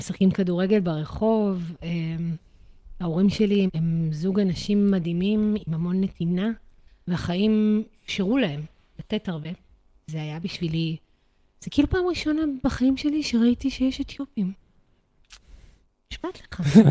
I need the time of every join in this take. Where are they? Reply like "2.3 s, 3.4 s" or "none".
3.7 s, 10.0 s